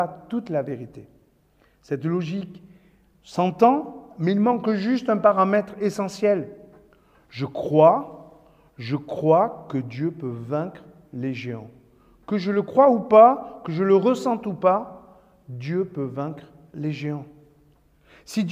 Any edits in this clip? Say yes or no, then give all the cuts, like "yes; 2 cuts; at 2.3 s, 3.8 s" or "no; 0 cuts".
no; 0 cuts